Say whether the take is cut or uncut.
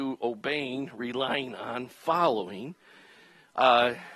uncut